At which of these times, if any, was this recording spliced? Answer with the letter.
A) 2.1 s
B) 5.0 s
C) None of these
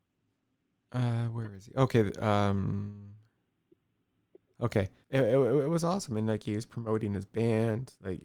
B